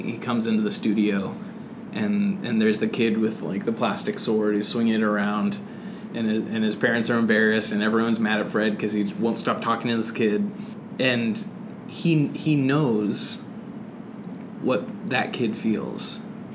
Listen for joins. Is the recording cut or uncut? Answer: uncut